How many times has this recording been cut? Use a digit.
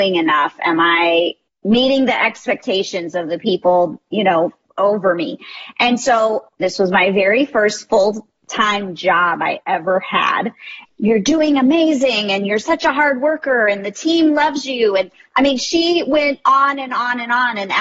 3